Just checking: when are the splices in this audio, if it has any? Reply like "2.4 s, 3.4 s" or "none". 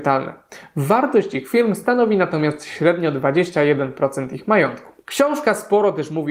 none